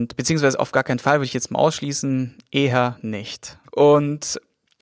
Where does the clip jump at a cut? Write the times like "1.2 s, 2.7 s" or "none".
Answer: 3.6 s